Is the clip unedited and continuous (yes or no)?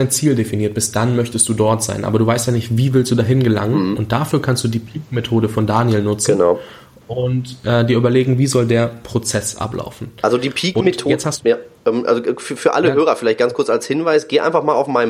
yes